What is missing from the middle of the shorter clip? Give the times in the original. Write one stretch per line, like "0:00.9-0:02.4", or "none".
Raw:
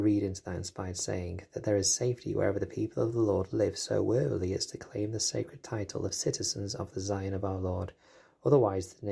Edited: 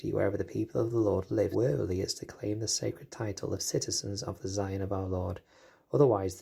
0:03.7-0:04.0